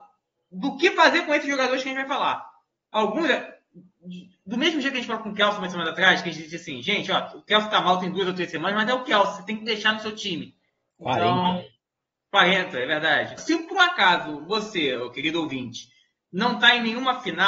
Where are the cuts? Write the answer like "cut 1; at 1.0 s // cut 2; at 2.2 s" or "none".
cut 1; at 10.9 s // cut 2; at 13.4 s